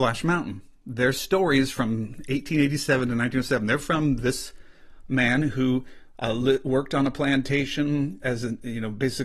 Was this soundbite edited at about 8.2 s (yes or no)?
yes